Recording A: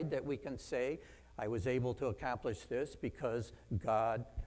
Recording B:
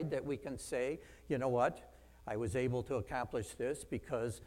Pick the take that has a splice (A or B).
A